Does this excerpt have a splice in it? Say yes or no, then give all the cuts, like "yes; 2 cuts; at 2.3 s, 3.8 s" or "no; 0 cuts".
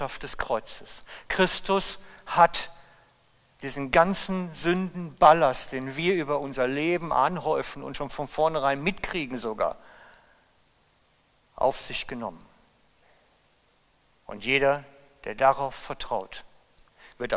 no; 0 cuts